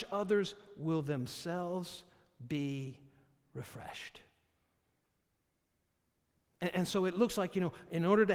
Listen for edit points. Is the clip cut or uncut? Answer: uncut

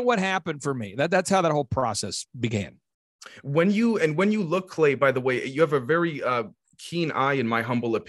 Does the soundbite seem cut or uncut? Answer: uncut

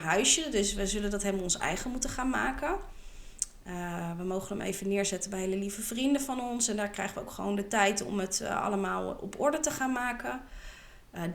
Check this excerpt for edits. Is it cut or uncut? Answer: uncut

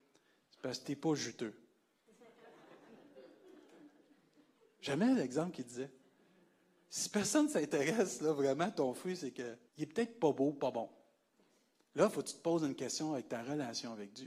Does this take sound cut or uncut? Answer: cut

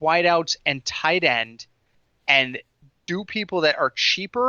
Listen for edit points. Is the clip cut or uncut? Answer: uncut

